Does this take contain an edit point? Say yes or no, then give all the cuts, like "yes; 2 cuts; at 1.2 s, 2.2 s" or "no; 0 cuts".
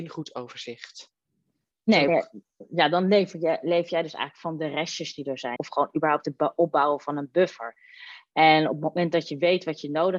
yes; 2 cuts; at 2.1 s, 5.6 s